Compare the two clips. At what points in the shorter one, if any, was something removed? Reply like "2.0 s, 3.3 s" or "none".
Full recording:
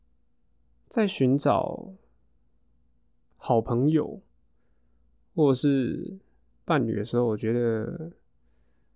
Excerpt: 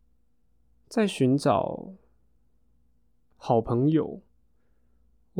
none